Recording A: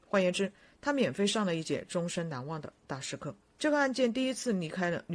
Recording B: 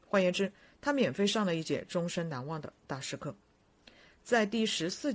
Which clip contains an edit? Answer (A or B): A